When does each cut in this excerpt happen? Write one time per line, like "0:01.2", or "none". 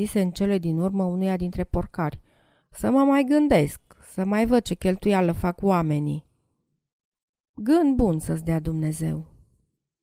0:02.6